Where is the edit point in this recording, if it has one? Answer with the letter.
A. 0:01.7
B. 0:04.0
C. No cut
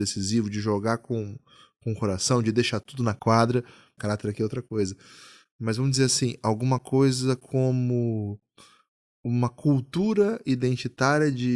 B